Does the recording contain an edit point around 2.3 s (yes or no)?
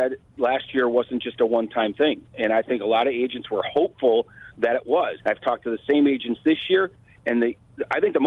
no